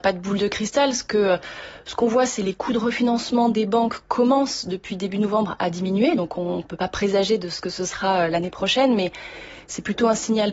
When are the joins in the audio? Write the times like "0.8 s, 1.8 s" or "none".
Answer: none